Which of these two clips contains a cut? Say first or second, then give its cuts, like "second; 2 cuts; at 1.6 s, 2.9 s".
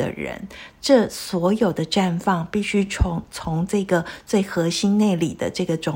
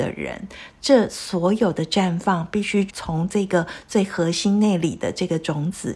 second; 1 cut; at 2.9 s